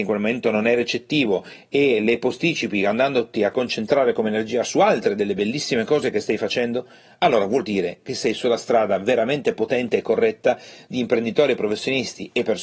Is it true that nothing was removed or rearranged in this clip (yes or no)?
yes